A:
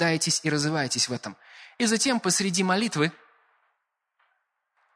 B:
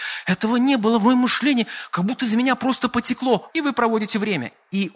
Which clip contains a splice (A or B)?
B